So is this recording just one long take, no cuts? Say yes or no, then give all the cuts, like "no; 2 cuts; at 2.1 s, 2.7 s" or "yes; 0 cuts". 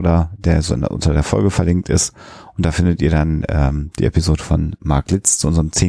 yes; 0 cuts